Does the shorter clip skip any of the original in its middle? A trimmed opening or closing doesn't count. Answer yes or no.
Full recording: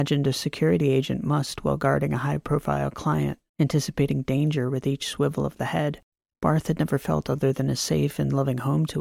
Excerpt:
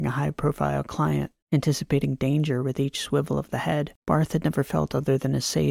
yes